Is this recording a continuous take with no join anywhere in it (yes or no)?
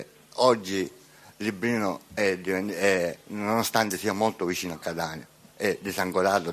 yes